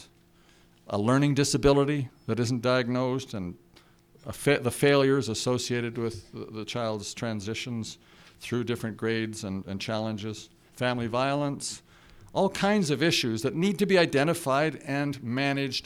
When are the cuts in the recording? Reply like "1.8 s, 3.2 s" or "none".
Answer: 10.7 s